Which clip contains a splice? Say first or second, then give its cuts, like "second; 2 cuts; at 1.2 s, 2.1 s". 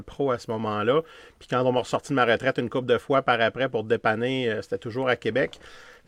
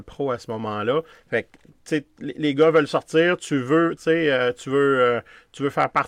second; 2 cuts; at 1.1 s, 4.0 s